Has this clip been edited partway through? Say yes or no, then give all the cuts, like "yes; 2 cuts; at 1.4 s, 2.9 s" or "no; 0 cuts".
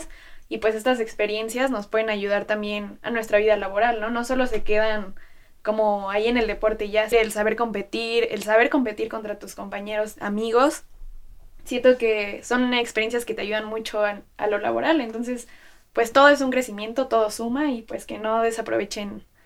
yes; 1 cut; at 7.1 s